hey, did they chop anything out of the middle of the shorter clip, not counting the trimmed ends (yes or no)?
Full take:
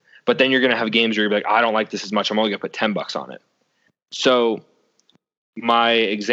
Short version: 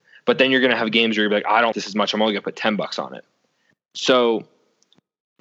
yes